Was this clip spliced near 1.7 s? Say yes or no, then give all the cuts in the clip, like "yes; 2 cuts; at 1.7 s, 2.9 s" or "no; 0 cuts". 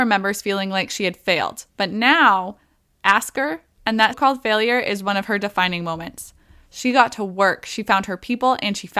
yes; 2 cuts; at 1.7 s, 4.1 s